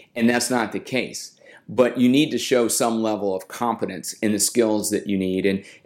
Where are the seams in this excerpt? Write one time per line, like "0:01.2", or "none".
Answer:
none